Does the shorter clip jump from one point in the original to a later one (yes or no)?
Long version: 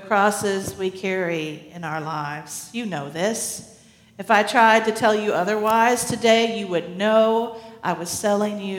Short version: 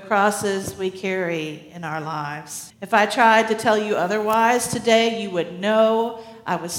yes